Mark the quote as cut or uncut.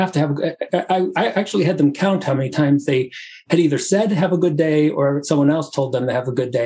uncut